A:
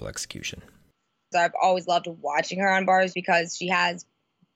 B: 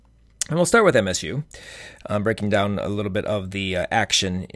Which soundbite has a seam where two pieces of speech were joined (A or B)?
A